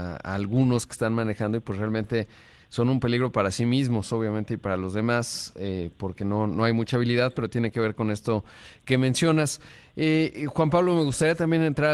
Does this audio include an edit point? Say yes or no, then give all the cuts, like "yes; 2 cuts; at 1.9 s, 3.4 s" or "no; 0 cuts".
no; 0 cuts